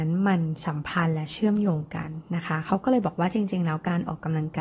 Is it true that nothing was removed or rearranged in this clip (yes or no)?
yes